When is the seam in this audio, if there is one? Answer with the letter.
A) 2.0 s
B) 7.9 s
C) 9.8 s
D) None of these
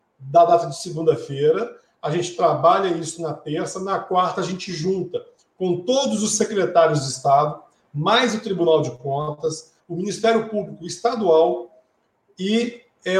C